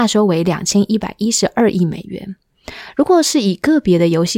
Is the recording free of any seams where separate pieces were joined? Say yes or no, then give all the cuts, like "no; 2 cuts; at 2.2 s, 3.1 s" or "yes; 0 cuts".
yes; 0 cuts